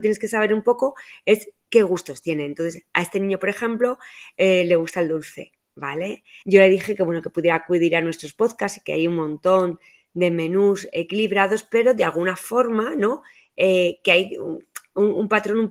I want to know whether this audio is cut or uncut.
cut